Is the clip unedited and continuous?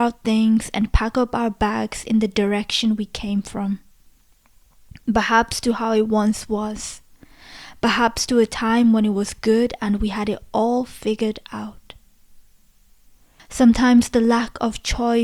no; 1 cut; at 13.4 s

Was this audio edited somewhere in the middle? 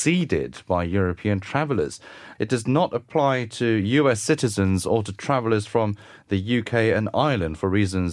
yes; 1 cut; at 2.3 s

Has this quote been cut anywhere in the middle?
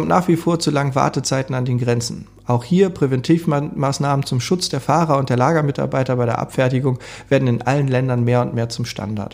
no; 0 cuts

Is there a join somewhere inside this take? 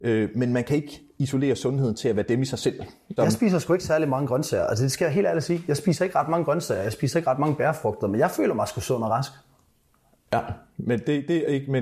yes; 1 cut; at 3.2 s

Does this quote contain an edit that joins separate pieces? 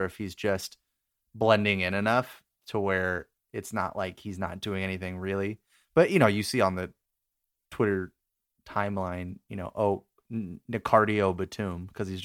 no; 0 cuts

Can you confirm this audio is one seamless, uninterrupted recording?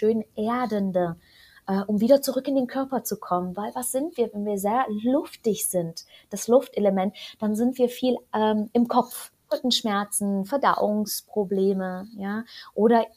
no; 1 cut; at 9.5 s

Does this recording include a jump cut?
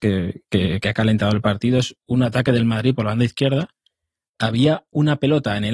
no; 0 cuts

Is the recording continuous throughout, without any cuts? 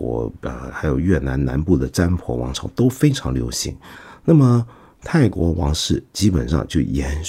yes; 0 cuts

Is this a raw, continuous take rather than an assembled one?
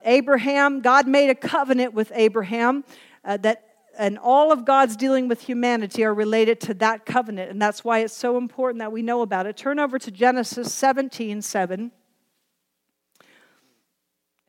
yes; 0 cuts

